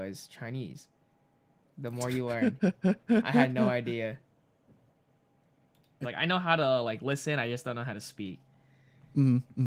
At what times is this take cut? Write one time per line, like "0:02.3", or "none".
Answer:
0:01.6
0:06.0